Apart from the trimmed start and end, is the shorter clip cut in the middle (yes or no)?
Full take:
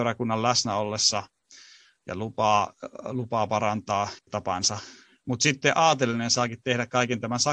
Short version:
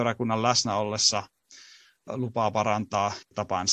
yes